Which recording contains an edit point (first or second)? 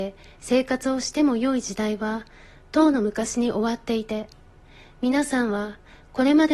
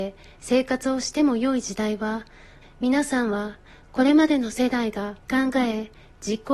second